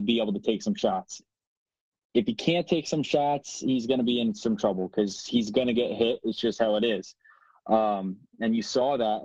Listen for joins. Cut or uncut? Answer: uncut